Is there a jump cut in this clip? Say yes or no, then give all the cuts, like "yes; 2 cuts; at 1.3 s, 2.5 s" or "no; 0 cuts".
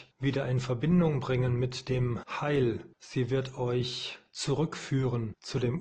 no; 0 cuts